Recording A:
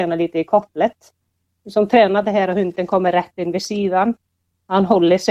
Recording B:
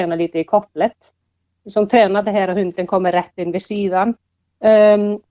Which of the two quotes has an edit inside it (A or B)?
B